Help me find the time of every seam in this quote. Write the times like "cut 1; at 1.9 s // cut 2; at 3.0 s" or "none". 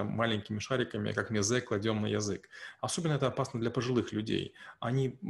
cut 1; at 2.8 s